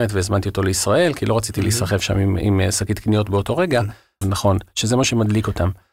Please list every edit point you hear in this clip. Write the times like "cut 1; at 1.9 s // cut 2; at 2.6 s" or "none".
cut 1; at 4.2 s